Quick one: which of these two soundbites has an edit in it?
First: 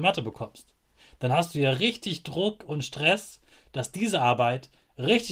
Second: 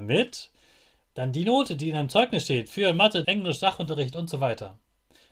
second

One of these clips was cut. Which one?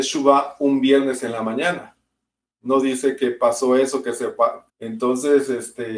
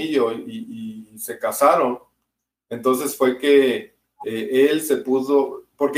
first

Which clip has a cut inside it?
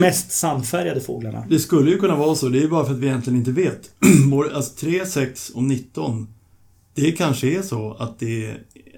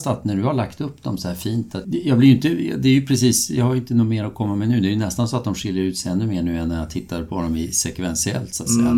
second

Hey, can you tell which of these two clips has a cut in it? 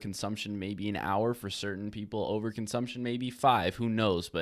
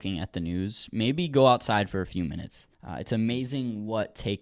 second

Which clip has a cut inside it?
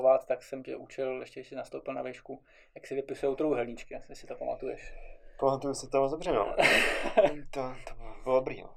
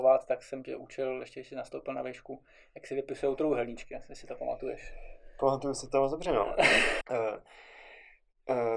second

